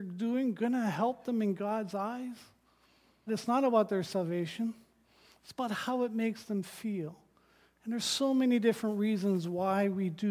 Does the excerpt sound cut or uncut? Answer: cut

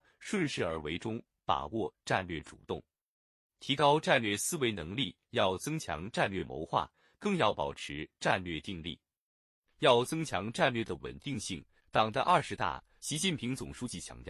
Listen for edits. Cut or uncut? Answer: cut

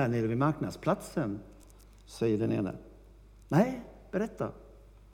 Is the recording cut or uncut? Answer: uncut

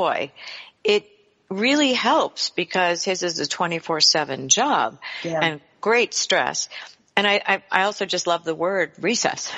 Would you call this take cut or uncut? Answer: uncut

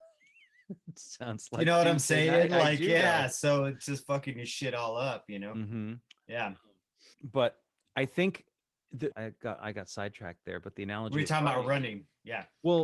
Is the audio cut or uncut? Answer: cut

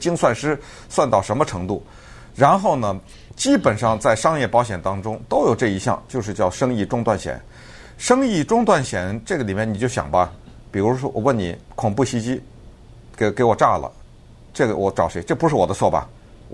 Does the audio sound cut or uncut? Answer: uncut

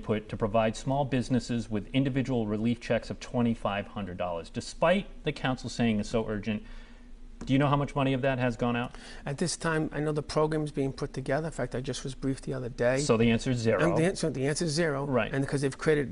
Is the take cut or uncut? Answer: uncut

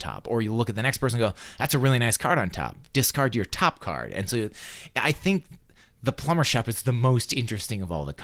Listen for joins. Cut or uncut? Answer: uncut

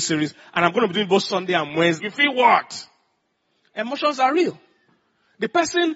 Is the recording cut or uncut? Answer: cut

